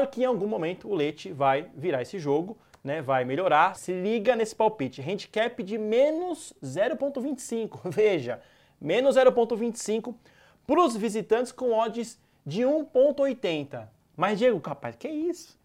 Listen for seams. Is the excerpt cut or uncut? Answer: cut